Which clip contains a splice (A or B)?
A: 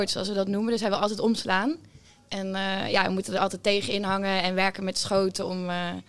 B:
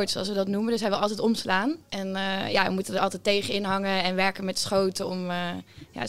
B